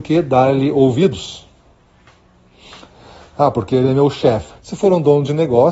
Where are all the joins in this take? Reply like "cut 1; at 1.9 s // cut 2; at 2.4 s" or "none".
cut 1; at 4.5 s